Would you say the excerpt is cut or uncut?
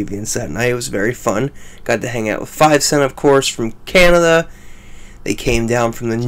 uncut